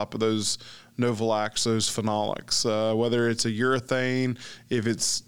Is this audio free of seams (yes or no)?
yes